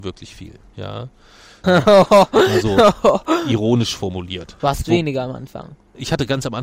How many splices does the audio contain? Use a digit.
2